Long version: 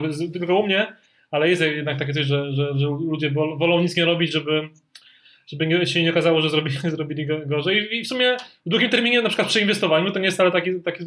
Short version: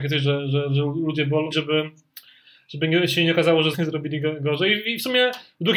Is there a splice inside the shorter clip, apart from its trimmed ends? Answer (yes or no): yes